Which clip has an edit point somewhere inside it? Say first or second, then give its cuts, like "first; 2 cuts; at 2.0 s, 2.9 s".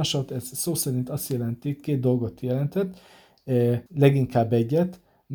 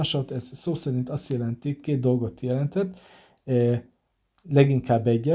first; 1 cut; at 3.9 s